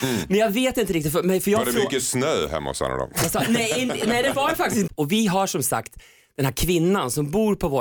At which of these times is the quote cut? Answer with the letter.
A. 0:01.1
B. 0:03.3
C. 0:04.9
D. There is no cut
C